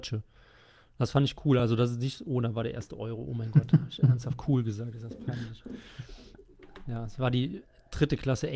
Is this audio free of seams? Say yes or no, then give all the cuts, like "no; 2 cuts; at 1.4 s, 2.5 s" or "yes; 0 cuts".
yes; 0 cuts